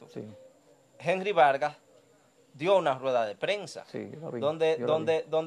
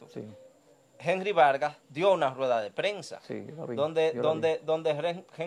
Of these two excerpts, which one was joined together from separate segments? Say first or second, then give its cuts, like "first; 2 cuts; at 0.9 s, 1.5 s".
second; 1 cut; at 1.8 s